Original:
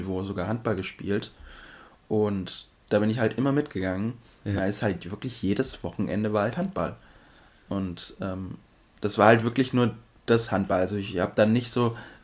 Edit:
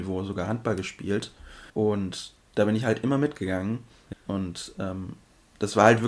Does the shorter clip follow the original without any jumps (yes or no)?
no